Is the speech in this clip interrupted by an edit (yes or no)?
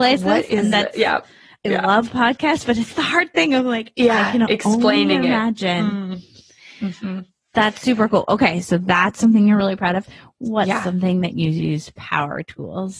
no